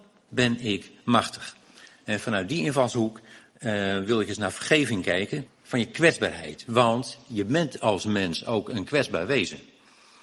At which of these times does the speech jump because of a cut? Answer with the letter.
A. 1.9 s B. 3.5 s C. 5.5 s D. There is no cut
C